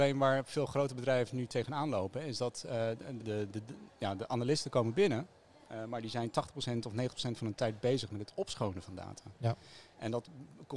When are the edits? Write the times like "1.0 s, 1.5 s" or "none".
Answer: 3.2 s